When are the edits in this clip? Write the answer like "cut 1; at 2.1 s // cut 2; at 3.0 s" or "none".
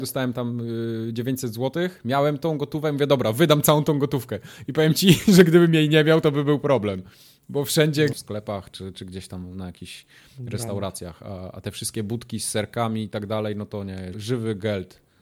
cut 1; at 8.1 s // cut 2; at 14.1 s